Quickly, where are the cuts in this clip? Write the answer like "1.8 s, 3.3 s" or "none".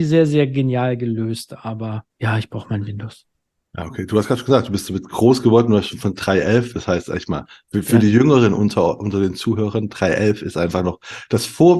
2.1 s